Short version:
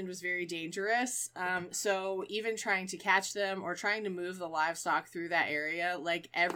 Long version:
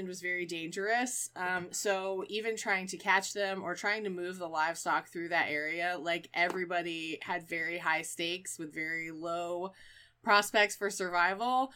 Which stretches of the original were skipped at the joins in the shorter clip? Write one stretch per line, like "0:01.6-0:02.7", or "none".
none